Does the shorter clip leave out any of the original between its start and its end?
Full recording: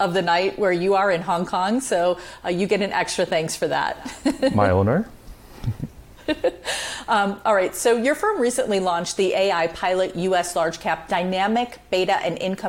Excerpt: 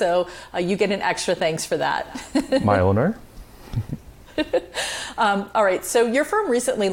no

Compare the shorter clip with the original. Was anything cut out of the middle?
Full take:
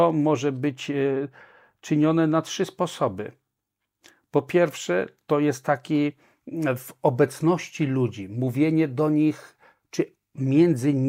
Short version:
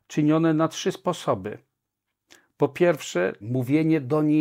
yes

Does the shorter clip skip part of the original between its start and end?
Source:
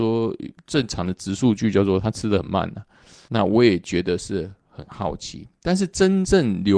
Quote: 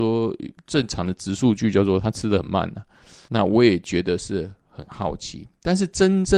no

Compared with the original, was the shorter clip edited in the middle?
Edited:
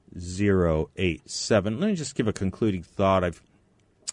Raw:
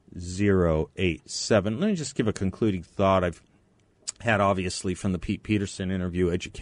no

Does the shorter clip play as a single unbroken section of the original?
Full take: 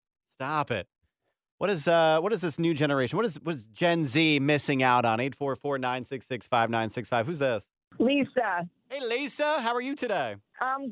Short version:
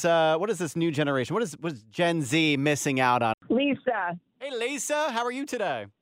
no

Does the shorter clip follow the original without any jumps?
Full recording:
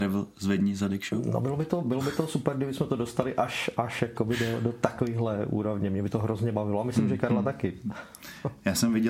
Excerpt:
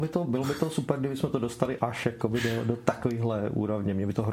no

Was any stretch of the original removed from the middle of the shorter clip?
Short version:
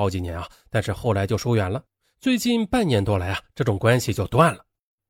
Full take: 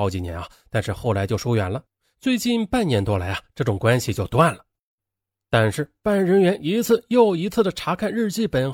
no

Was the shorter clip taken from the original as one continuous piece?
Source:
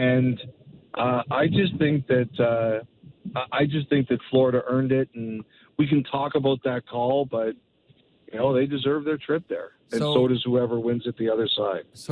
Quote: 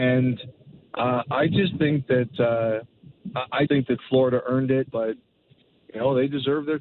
no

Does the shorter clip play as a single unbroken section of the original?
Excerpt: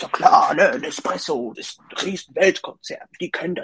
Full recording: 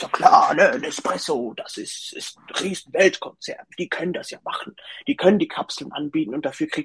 no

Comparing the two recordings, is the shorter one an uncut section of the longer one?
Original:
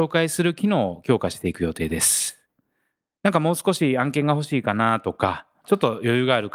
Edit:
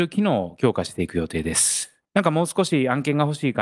no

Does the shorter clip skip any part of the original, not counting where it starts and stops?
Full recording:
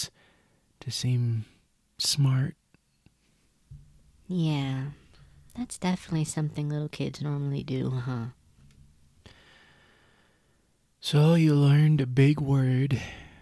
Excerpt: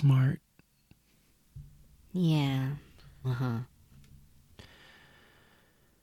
yes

